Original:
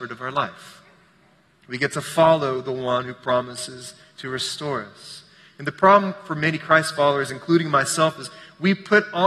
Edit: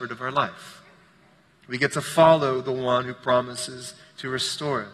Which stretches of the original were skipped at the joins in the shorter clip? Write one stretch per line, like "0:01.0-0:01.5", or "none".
none